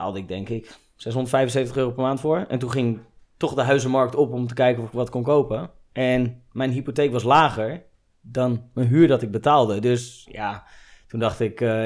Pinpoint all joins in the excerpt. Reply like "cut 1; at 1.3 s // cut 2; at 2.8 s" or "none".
none